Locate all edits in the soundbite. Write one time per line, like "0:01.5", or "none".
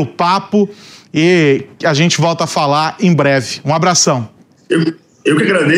none